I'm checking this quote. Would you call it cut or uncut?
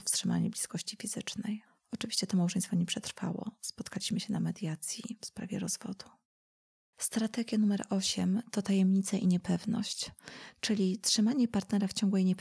uncut